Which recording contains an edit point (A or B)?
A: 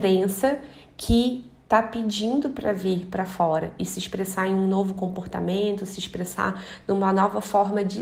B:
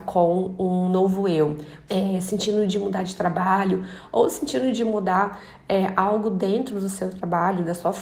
B